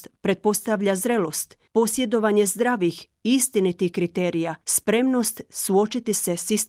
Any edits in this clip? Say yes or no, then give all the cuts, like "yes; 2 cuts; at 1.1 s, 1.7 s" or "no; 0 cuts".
yes; 2 cuts; at 1.7 s, 4.6 s